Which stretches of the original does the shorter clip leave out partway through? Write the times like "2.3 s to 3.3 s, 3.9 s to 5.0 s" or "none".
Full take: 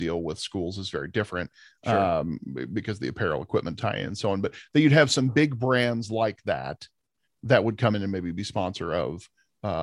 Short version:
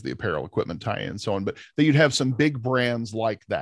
none